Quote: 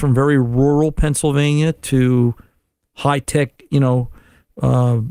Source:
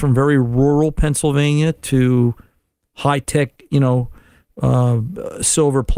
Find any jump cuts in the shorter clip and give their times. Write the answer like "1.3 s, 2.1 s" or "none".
none